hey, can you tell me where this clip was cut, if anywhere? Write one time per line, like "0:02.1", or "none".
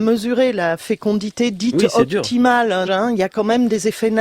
0:02.9

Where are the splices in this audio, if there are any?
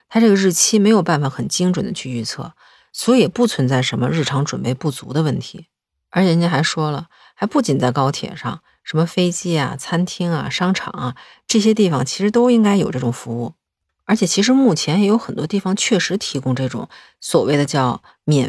none

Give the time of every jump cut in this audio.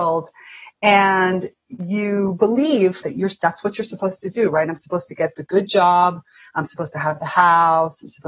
0:03.0

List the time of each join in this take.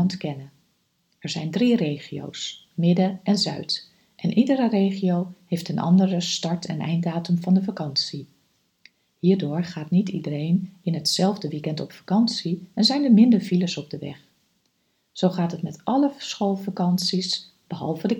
0:02.7

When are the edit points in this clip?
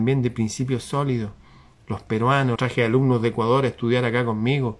0:02.6

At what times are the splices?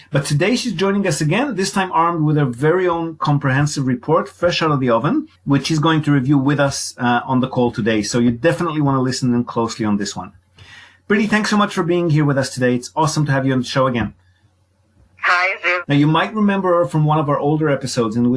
0:05.4
0:15.8

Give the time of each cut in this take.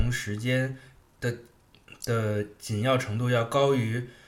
none

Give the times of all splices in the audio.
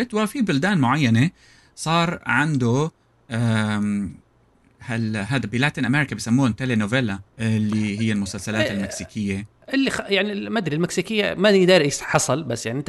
0:07.3

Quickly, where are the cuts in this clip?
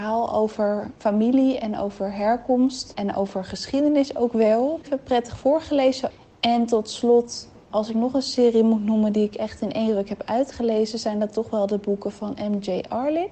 none

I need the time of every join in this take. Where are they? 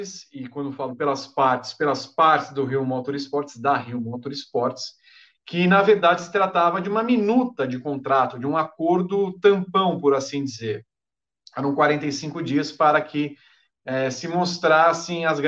none

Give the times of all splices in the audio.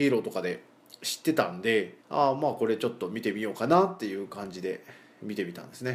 0:02.0

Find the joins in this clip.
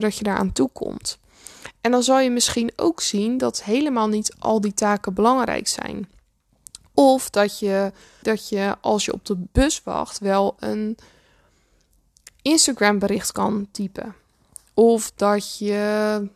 0:08.2

